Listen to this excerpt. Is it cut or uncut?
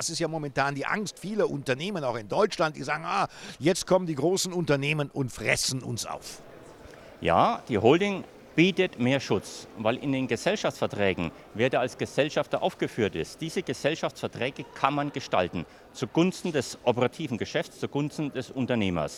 uncut